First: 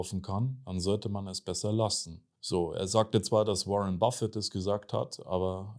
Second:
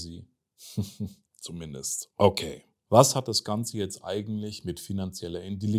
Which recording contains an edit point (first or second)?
second